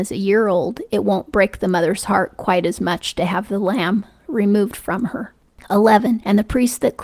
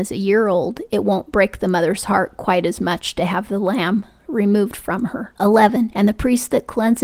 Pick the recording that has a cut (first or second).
second